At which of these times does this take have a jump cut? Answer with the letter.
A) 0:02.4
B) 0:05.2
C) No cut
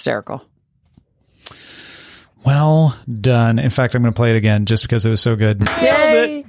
C